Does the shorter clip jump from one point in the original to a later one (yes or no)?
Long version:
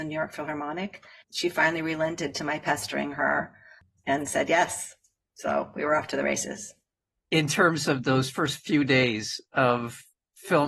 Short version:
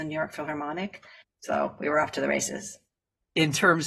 yes